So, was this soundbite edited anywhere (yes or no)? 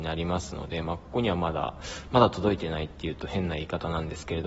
no